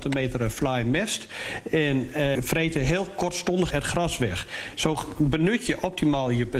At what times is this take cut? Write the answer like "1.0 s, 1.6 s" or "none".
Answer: 2.3 s, 3.7 s